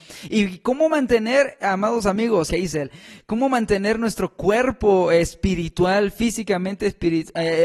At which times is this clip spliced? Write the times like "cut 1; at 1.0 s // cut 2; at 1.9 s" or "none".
cut 1; at 2.5 s